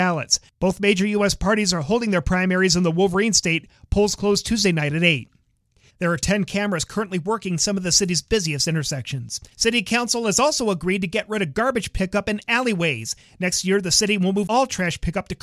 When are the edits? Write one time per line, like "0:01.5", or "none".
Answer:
0:05.9
0:09.5